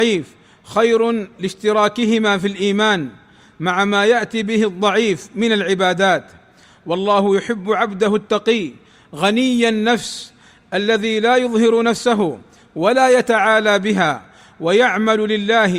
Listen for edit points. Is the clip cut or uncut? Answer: uncut